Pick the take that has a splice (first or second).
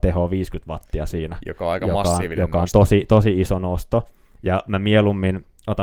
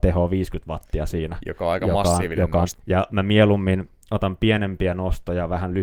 second